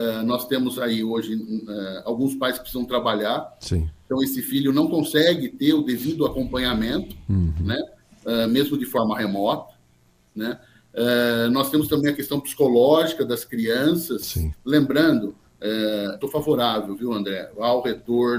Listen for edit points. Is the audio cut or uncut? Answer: cut